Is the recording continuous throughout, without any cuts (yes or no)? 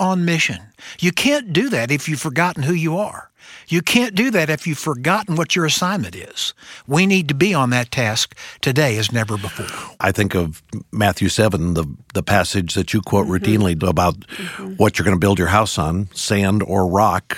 no